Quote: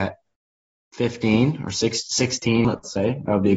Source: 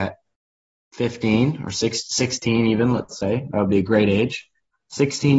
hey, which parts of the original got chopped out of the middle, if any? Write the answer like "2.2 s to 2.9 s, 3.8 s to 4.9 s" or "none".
2.6 s to 2.9 s